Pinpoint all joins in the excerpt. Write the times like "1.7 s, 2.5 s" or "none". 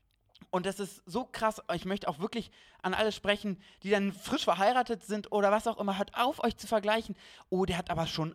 none